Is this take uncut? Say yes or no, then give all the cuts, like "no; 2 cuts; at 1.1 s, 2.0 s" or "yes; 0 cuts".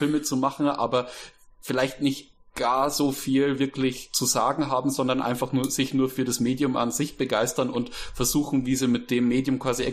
yes; 0 cuts